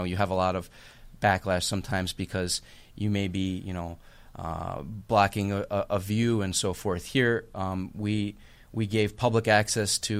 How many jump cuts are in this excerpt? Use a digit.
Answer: 0